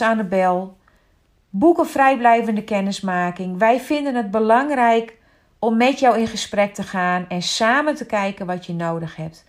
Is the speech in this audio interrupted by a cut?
no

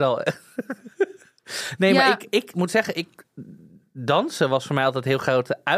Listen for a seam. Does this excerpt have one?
no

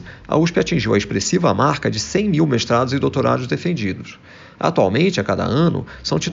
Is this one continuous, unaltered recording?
yes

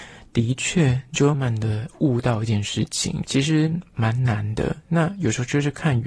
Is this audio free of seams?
no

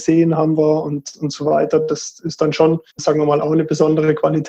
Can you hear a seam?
yes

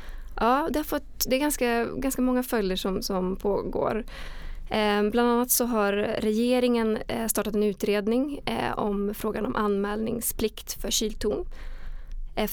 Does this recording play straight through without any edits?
yes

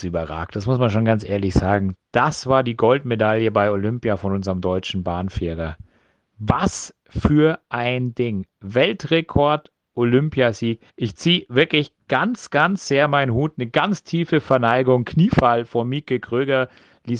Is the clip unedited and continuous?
no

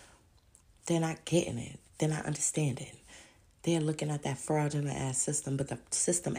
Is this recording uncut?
yes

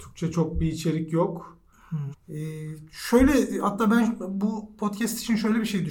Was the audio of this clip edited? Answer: yes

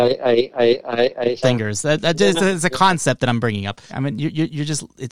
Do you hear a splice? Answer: yes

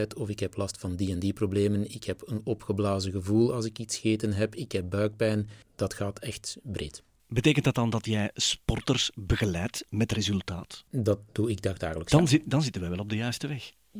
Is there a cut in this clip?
no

